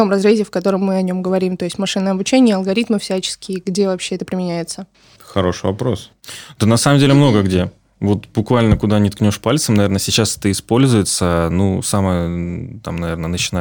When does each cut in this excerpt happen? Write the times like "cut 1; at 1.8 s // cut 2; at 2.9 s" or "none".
none